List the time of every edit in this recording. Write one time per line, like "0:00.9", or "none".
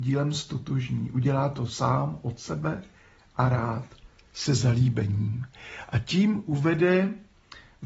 none